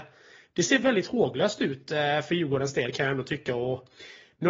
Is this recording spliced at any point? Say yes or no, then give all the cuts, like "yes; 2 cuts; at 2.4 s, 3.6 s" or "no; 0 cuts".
no; 0 cuts